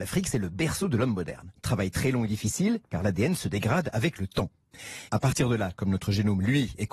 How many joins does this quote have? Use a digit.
2